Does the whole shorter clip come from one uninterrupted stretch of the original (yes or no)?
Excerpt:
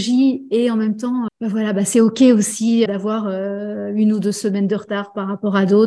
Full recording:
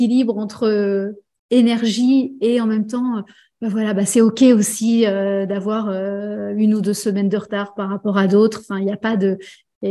no